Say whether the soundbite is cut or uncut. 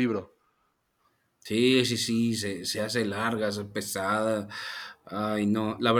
uncut